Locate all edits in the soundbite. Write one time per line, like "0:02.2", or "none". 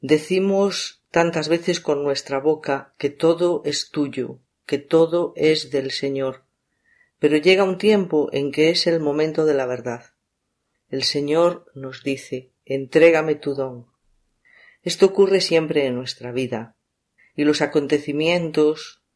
0:17.2